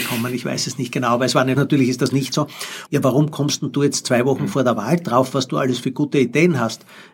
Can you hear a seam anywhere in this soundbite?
yes; 2 cuts; at 1.5 s, 2.9 s

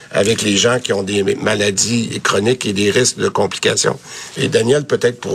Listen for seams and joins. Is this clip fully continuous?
no; 1 cut; at 4.3 s

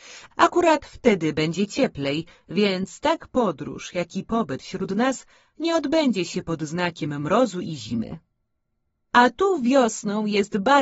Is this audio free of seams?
yes; 0 cuts

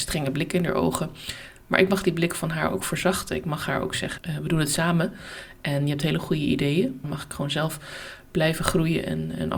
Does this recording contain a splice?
yes; 2 cuts; at 4.2 s, 7.0 s

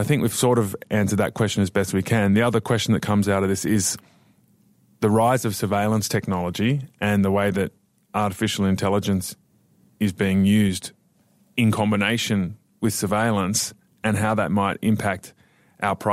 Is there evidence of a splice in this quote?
no; 0 cuts

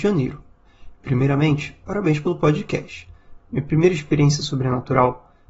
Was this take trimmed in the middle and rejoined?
yes; 1 cut; at 3.4 s

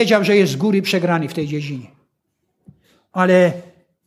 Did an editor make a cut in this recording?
no; 0 cuts

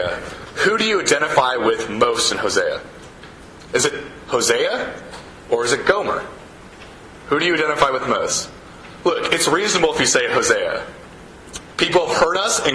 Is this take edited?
no; 0 cuts

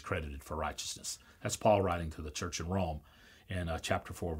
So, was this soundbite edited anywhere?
no; 0 cuts

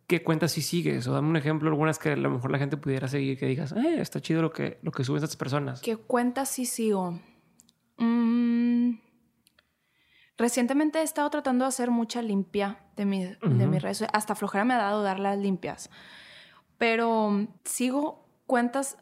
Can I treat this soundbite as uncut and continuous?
no; 1 cut; at 17.6 s

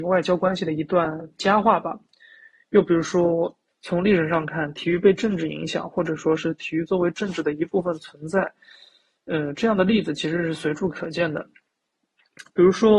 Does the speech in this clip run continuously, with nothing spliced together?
no; 1 cut; at 3.7 s

